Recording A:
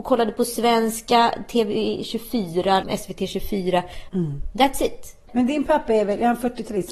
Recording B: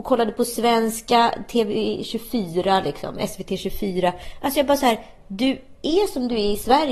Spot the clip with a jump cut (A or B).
A